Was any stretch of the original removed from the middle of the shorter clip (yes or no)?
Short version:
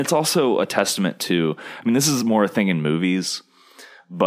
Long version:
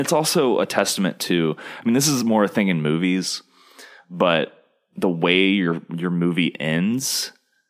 no